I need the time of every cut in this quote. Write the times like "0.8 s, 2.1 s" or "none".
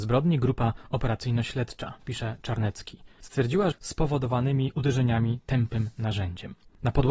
3.7 s